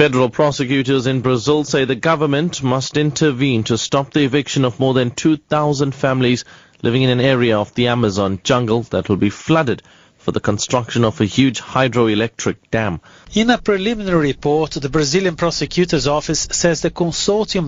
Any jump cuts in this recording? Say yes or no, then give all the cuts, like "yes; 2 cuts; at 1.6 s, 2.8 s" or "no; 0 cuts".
yes; 1 cut; at 13.2 s